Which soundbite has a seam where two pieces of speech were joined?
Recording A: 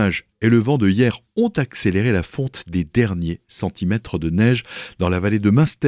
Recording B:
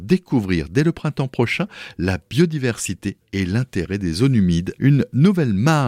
B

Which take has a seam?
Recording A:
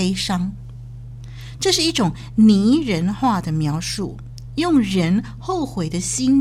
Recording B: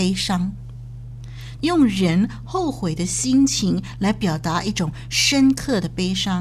B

